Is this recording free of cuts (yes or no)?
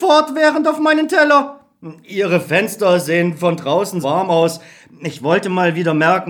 no